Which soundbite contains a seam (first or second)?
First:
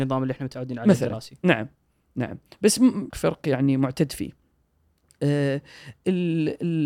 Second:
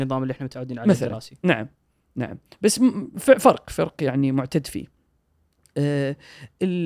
first